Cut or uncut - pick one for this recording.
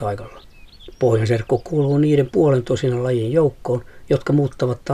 uncut